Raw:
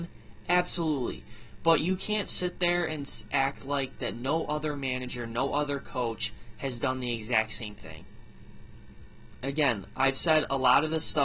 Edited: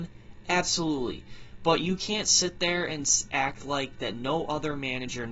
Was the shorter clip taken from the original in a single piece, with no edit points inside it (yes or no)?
yes